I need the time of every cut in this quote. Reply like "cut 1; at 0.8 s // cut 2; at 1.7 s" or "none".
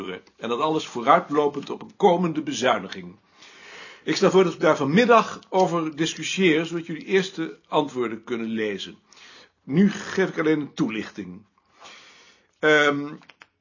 none